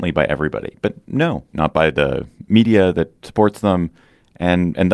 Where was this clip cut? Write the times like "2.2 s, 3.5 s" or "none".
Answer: 1.5 s